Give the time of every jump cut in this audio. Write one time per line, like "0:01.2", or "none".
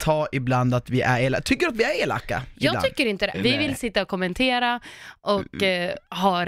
0:03.3